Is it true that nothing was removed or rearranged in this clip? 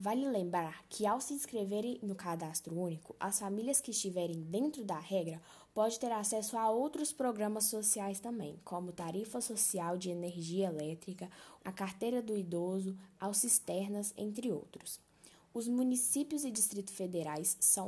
no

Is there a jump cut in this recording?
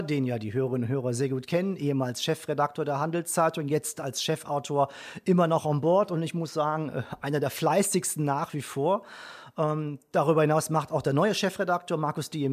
no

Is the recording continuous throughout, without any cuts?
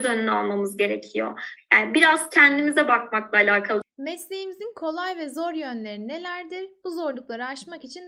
no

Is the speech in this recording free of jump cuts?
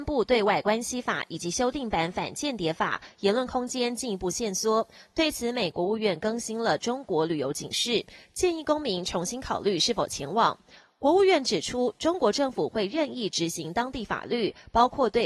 no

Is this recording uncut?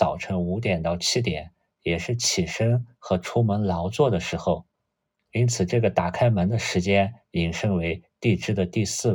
yes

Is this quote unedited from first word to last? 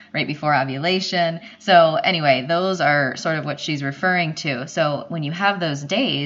yes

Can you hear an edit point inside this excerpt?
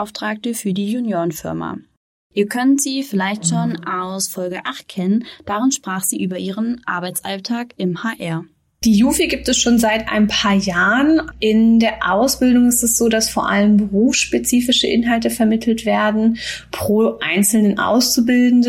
no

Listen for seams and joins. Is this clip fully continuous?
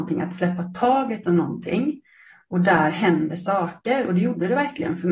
yes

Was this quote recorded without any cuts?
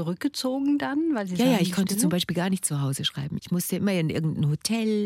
no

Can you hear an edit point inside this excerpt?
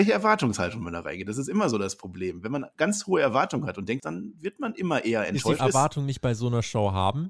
yes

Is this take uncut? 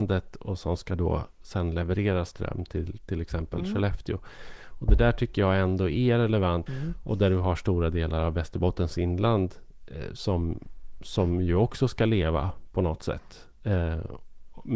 no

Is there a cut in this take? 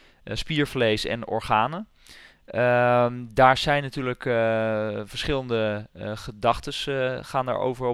no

